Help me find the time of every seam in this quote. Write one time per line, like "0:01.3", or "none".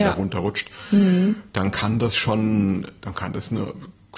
none

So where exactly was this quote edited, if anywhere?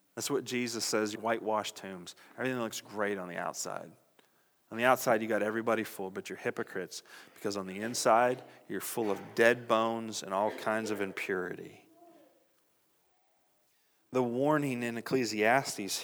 0:01.1

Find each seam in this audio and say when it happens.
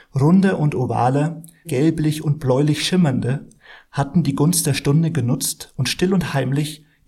0:01.6

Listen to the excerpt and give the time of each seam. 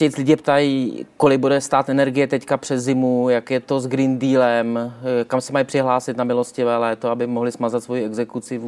none

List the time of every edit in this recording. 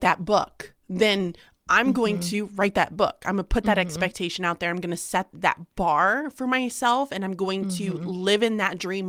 0:05.3

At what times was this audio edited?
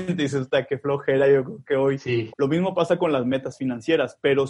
0:02.3

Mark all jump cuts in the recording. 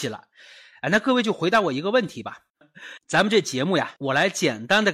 0:02.6
0:04.0

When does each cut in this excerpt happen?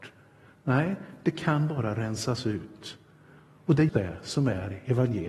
0:03.9

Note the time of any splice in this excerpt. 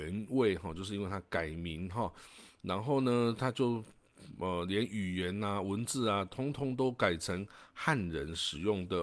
none

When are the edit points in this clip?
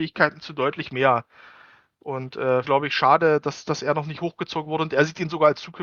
0:02.6

